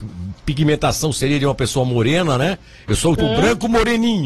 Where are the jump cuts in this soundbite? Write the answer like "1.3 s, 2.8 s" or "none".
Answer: 3.2 s